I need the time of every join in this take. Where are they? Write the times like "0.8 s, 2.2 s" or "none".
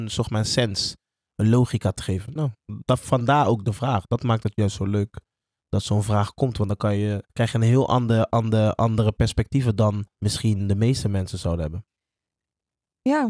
7.3 s, 10.1 s